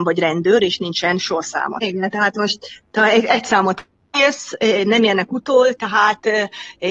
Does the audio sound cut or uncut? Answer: cut